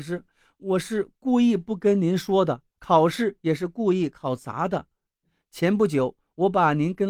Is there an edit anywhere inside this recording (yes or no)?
yes